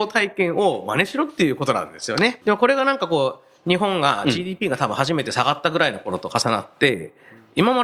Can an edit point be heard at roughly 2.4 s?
yes; 1 cut; at 2.4 s

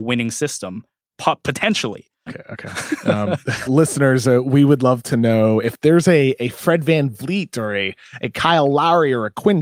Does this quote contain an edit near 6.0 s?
no; 2 cuts; at 2.3 s, 3.7 s

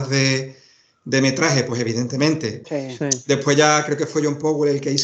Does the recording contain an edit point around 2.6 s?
yes; 1 cut; at 2.6 s

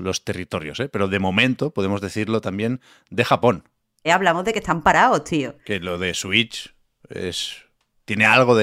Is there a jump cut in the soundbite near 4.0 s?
yes; 1 cut; at 4.0 s

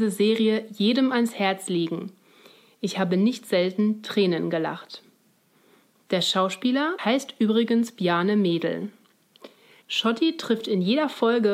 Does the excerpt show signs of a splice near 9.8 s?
yes; 2 cuts; at 7.0 s, 9.8 s

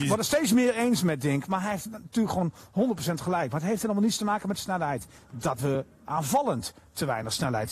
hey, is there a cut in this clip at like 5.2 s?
yes; 1 cut; at 5.2 s

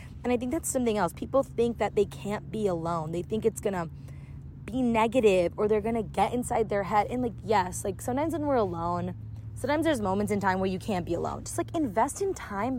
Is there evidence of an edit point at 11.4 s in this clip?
yes; 1 cut; at 11.4 s

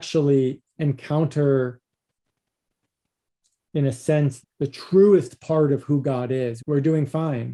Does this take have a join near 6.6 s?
yes; 2 cuts; at 4.4 s, 6.6 s

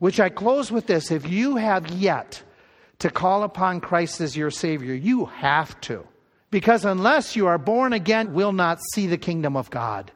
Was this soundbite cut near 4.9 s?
no; 2 cuts; at 6.4 s, 8.2 s

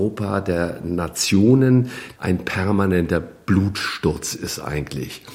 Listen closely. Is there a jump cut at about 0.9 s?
no; 1 cut; at 2.2 s

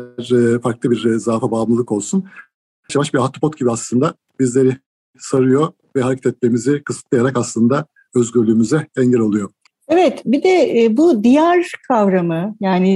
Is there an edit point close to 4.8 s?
no; 2 cuts; at 2.9 s, 9.7 s

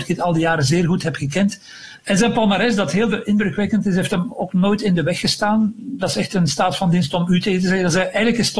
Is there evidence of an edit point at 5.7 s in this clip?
no; 1 cut; at 2.0 s

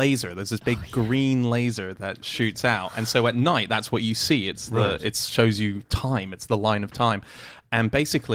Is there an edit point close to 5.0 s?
no; 0 cuts

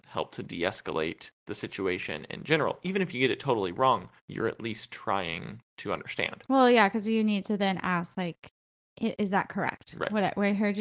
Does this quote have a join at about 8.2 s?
no; 1 cut; at 4.2 s

